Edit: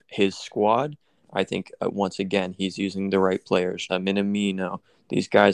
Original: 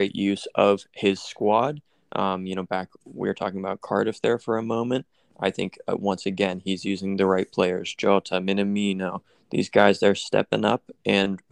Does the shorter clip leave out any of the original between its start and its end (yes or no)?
yes